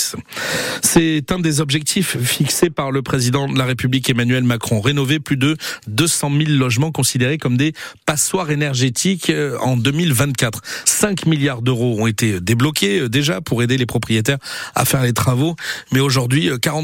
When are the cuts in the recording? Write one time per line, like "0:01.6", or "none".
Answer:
none